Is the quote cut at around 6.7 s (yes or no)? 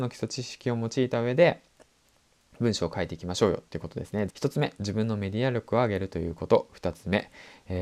no